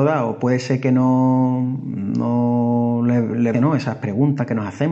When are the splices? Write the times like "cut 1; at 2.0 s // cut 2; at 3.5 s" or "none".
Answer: cut 1; at 3.5 s